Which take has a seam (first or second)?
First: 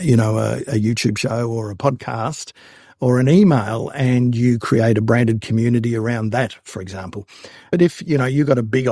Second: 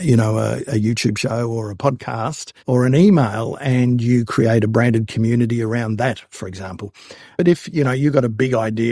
second